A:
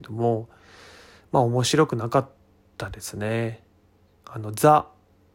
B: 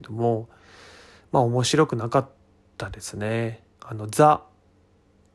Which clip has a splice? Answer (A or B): B